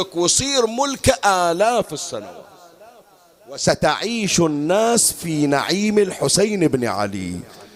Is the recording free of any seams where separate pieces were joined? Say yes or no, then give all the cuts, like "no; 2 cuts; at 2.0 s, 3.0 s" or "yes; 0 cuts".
yes; 0 cuts